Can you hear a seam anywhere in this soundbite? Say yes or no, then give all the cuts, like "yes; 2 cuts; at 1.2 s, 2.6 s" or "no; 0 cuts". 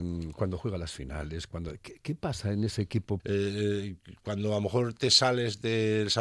yes; 1 cut; at 3.2 s